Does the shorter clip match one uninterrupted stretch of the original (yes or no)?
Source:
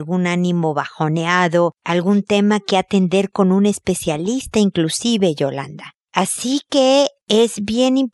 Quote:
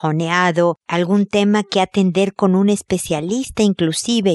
yes